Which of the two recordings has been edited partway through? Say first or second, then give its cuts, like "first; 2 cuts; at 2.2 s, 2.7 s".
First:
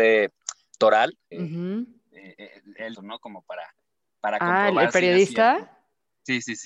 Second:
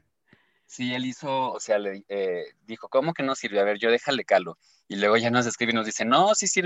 first; 2 cuts; at 1.3 s, 2.9 s